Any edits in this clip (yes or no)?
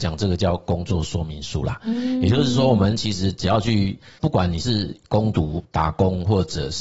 no